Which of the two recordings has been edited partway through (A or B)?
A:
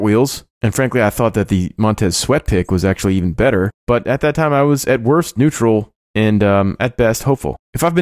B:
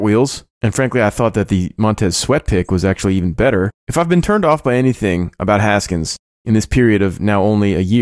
B